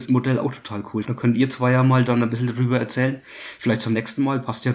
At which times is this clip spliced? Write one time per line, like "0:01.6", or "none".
0:01.0